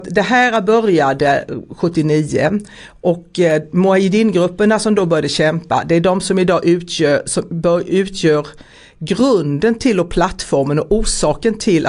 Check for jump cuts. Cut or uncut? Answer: uncut